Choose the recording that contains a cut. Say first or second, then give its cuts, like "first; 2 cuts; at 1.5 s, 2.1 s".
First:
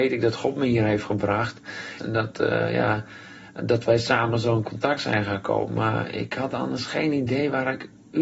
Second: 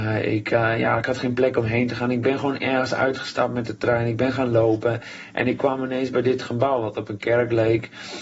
first; 1 cut; at 2.0 s